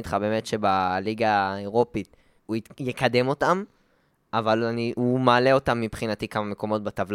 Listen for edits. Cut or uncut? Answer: cut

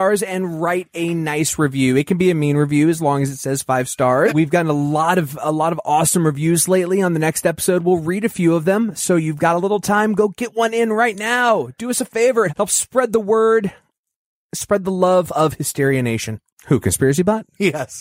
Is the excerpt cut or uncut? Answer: cut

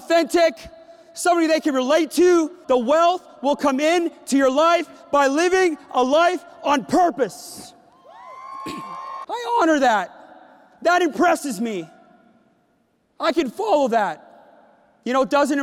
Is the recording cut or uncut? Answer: cut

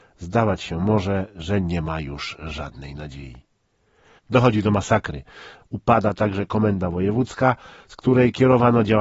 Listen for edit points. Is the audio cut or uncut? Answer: cut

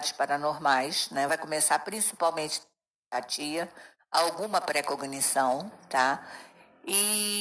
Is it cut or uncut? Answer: uncut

